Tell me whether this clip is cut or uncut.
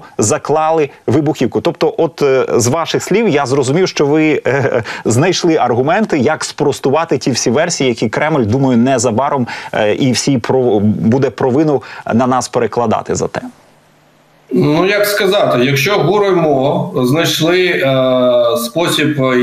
uncut